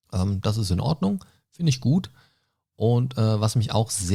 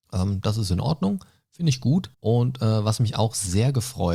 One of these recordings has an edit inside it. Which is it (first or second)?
second